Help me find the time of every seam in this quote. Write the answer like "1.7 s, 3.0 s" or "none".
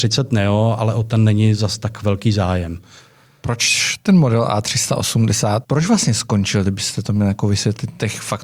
5.6 s